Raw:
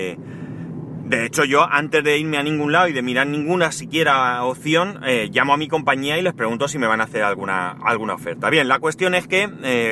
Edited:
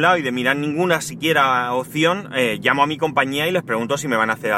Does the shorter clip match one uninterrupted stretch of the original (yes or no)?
yes